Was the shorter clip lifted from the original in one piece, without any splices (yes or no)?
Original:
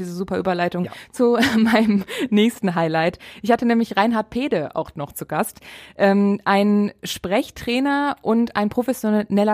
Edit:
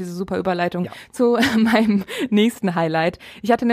yes